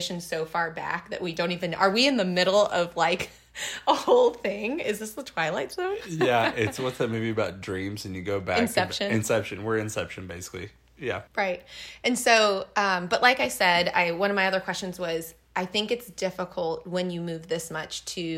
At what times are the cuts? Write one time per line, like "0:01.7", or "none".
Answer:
0:11.3